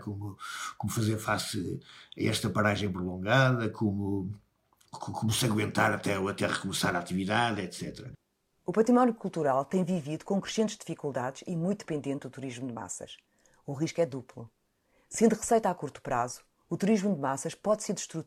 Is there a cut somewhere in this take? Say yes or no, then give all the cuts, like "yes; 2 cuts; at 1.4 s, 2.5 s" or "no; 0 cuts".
no; 0 cuts